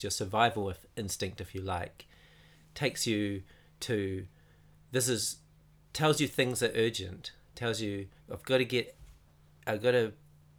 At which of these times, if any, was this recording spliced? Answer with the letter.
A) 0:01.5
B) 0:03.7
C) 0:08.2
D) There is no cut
C